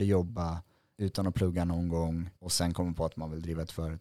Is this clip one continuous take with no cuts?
no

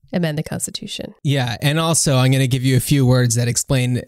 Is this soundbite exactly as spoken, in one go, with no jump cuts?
yes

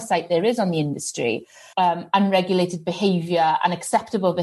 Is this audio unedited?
no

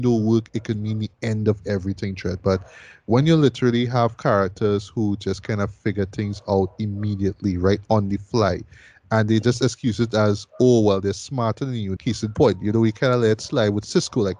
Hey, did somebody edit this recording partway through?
yes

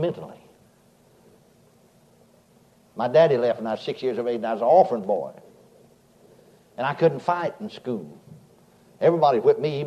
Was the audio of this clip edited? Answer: no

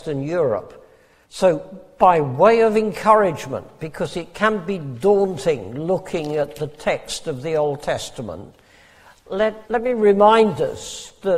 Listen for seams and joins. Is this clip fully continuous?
no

